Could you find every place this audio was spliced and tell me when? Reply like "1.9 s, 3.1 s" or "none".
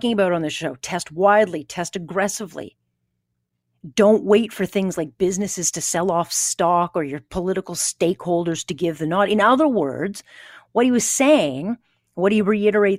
none